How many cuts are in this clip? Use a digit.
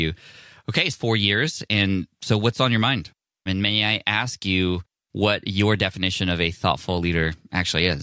2